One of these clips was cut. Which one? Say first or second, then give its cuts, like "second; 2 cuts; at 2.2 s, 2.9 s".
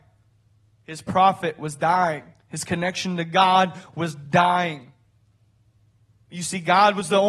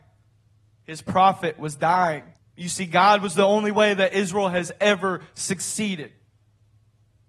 second; 1 cut; at 2.4 s